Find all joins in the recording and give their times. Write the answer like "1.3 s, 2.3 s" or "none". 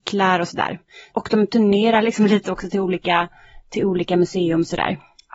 1.1 s